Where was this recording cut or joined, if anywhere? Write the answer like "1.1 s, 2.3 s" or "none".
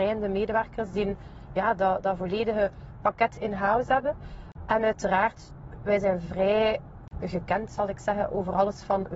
none